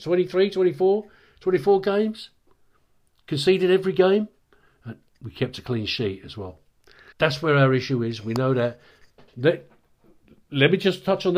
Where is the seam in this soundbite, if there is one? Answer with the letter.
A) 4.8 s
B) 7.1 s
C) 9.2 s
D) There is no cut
B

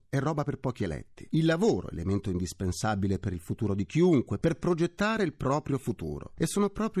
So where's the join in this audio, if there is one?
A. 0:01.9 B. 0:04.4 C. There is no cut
B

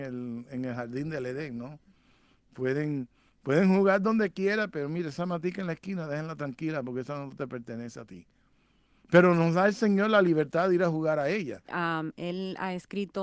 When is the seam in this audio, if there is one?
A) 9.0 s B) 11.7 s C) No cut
B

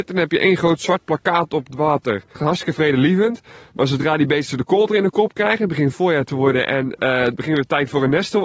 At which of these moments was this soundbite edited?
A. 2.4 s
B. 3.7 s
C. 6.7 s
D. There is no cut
A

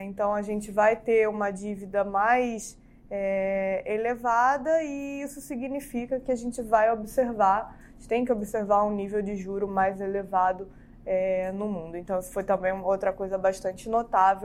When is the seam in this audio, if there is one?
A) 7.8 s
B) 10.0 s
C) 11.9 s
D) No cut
D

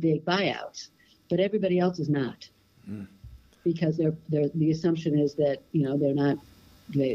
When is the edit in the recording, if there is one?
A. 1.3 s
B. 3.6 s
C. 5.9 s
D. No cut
D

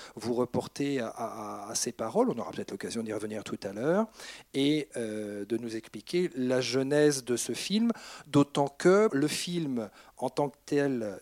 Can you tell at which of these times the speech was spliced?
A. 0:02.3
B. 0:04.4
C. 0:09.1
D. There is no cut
C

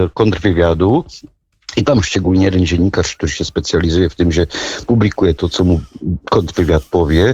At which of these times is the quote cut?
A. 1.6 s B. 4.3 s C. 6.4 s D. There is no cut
D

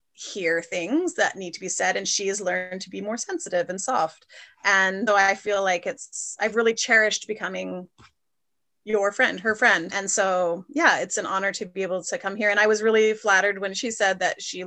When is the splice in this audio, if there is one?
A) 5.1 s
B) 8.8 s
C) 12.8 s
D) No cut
A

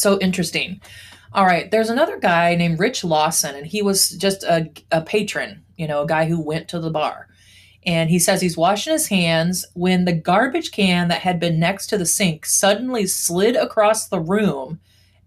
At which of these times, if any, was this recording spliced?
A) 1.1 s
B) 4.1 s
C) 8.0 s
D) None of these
D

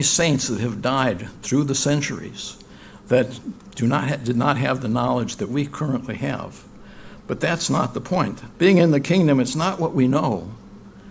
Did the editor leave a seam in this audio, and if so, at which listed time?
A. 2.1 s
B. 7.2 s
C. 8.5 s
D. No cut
C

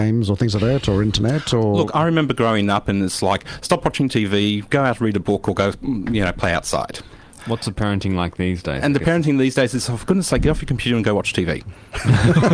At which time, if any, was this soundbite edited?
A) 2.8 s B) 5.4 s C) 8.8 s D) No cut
D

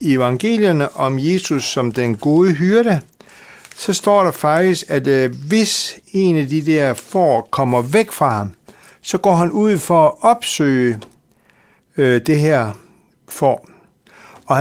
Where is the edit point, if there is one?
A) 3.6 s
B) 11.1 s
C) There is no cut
C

